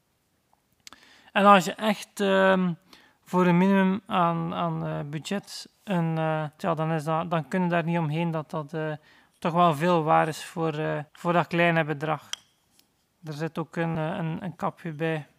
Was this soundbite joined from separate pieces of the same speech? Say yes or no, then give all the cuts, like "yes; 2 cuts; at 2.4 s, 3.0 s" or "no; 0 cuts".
yes; 3 cuts; at 6.6 s, 11.1 s, 13.9 s